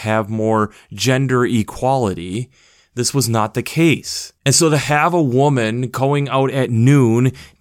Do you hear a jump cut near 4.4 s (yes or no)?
no